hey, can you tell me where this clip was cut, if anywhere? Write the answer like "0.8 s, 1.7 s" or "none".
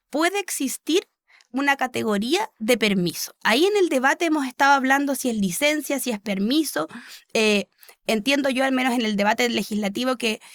none